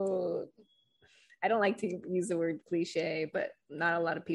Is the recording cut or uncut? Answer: cut